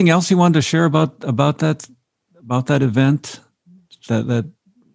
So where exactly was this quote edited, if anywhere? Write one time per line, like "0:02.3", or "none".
none